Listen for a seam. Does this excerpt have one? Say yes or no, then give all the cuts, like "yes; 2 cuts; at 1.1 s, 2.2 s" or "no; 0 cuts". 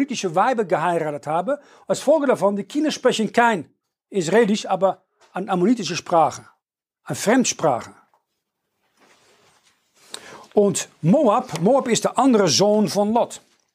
no; 0 cuts